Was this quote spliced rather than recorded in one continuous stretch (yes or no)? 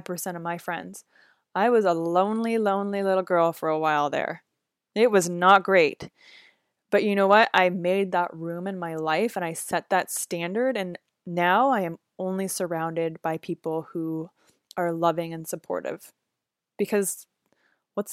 no